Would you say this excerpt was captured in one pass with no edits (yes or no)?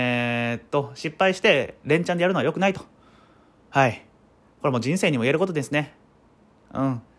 yes